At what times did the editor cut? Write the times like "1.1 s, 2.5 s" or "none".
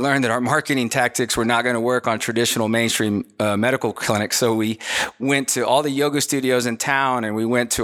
none